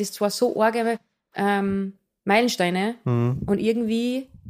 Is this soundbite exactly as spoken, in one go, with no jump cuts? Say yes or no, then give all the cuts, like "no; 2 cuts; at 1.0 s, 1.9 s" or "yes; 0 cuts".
yes; 0 cuts